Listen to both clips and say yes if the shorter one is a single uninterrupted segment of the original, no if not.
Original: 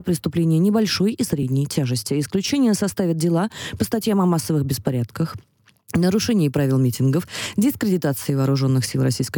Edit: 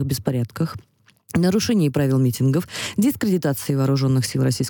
yes